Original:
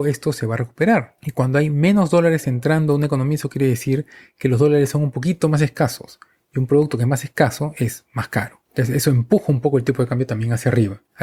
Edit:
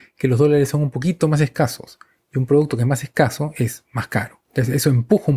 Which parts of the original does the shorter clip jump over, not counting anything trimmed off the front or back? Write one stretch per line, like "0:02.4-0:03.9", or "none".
none

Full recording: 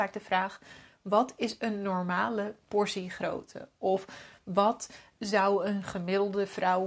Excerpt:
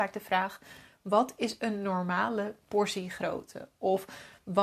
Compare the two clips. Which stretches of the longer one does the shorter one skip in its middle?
none

